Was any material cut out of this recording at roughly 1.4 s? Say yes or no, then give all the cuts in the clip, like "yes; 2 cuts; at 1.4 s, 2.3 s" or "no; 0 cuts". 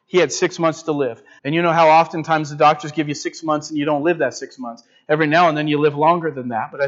yes; 1 cut; at 1.4 s